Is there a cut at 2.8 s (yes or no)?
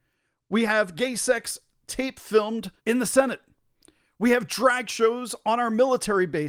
yes